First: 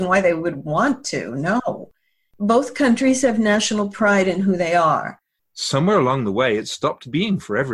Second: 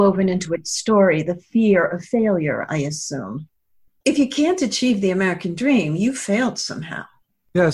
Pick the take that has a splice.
first; 1 cut; at 5.4 s

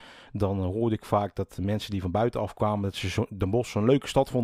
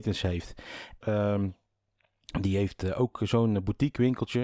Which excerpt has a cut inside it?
second; 1 cut; at 1.0 s

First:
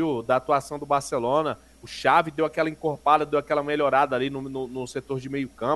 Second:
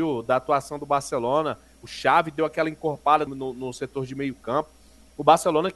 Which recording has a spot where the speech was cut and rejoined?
second; 1 cut; at 3.3 s

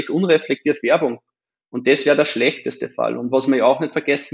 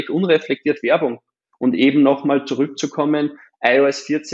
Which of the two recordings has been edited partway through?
second; 1 cut; at 1.5 s

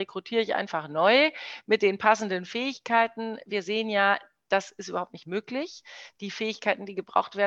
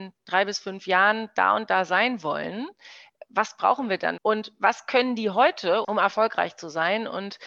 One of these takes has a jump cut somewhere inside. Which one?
second; 2 cuts; at 4.2 s, 5.8 s

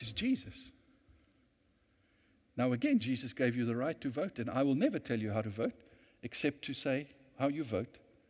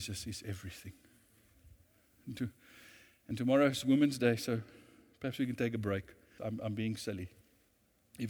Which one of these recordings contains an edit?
second; 2 cuts; at 2.1 s, 6.4 s

